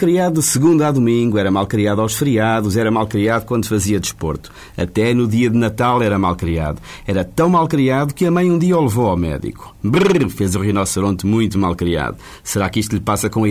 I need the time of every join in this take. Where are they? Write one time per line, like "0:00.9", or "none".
0:09.8